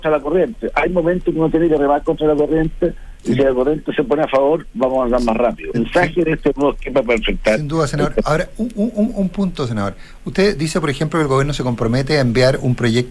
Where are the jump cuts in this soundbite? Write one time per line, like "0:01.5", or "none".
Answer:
0:05.7